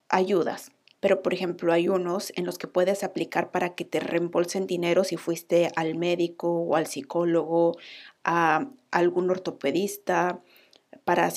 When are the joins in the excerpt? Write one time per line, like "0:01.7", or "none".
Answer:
0:00.9